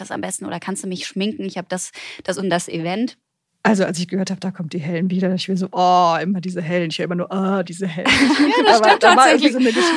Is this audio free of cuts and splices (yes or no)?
no